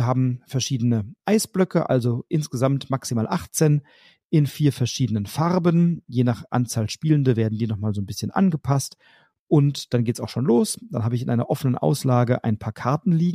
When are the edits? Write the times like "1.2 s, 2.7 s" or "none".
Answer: none